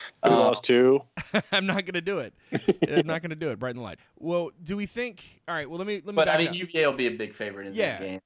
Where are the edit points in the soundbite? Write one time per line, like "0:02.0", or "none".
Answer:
0:04.0